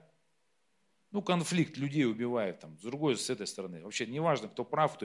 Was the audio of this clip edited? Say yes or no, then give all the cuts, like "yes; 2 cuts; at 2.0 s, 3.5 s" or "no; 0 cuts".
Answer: no; 0 cuts